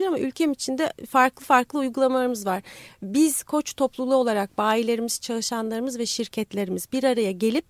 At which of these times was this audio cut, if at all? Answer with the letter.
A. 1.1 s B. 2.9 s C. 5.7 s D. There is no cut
B